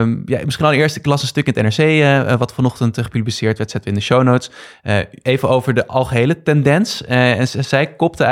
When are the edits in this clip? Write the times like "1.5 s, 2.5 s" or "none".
none